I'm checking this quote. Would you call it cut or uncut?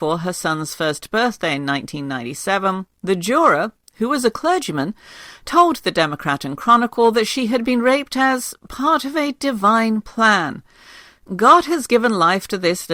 uncut